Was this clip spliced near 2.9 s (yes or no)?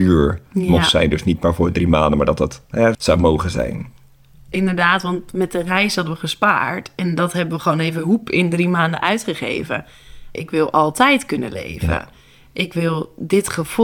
yes